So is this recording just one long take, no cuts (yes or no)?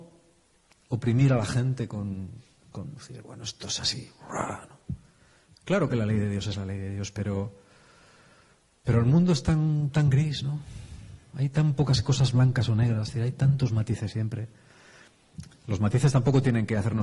yes